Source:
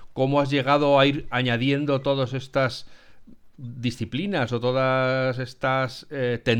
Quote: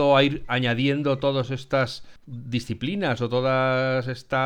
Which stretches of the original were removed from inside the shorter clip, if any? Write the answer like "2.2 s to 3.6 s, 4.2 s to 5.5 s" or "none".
3.0 s to 3.5 s